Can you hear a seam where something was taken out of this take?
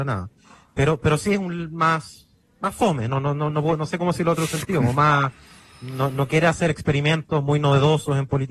no; 0 cuts

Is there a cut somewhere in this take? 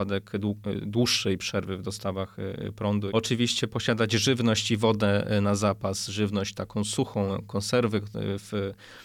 yes; 1 cut; at 3.1 s

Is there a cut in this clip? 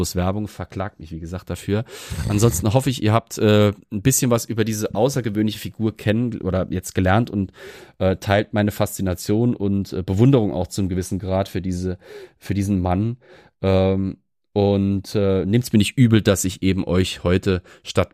no; 0 cuts

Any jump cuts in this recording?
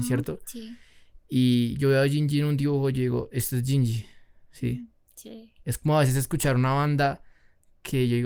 no; 0 cuts

